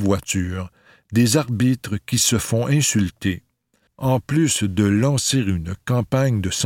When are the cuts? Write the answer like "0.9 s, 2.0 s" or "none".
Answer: 3.9 s